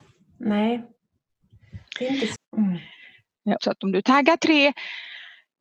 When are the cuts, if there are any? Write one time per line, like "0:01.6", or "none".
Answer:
0:02.4
0:03.6